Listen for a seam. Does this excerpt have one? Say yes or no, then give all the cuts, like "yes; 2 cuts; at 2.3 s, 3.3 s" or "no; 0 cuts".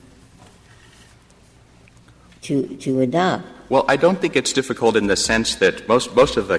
no; 0 cuts